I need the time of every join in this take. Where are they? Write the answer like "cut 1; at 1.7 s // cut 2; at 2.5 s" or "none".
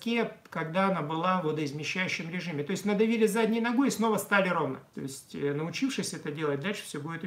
cut 1; at 4.9 s